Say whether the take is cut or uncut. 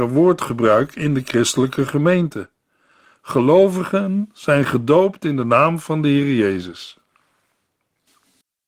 uncut